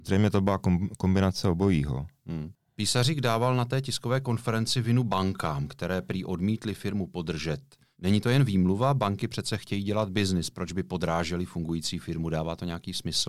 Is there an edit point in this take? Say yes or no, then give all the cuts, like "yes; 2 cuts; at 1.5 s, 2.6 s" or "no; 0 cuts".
no; 0 cuts